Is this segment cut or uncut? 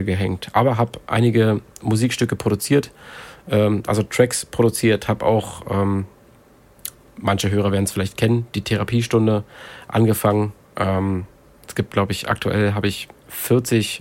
uncut